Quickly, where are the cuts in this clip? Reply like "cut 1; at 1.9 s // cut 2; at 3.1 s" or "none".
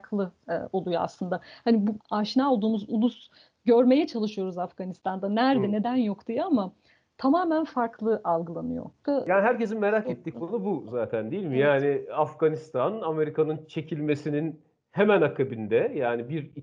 cut 1; at 2.0 s // cut 2; at 9.0 s